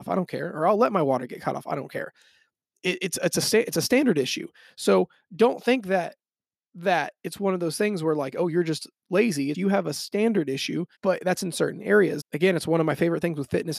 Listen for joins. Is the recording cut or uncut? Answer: cut